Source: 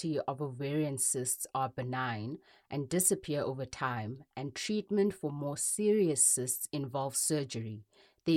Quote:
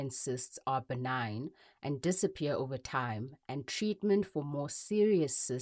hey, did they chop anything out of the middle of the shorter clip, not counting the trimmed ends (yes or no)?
no